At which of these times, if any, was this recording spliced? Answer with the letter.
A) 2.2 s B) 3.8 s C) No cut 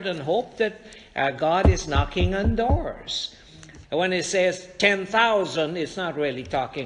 B